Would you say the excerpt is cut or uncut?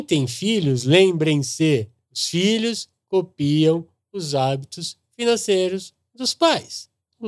uncut